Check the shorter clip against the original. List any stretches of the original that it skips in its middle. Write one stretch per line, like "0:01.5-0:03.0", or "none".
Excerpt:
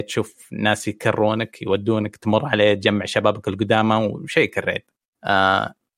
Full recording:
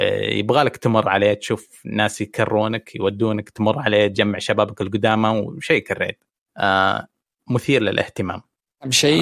none